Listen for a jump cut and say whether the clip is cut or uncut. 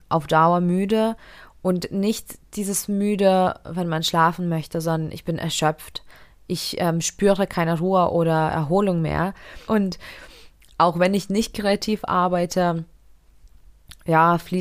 cut